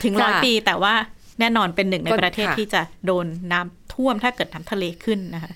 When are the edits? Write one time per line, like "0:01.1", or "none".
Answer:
0:01.3